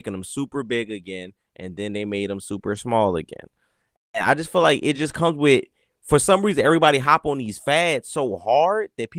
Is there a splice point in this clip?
no; 0 cuts

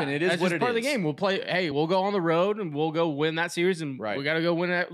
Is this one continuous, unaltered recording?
yes; 0 cuts

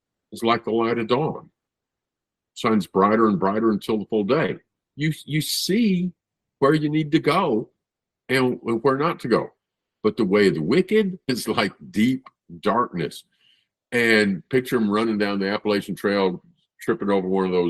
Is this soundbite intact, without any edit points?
no; 1 cut; at 11.2 s

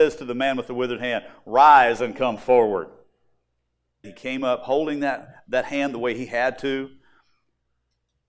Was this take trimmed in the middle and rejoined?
yes; 1 cut; at 4.0 s

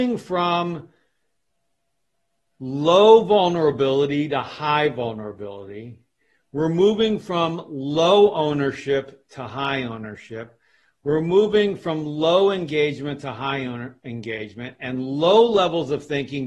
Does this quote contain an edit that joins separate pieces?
no; 0 cuts

